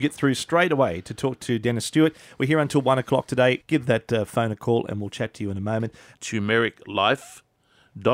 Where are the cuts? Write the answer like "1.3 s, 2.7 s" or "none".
3.6 s, 6.1 s